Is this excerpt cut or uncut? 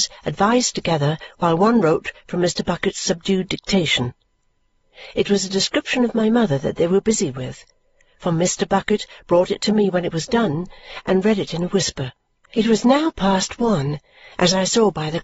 cut